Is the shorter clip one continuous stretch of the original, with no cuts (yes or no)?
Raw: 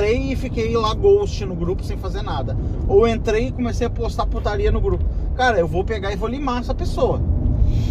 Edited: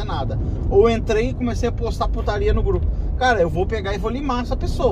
yes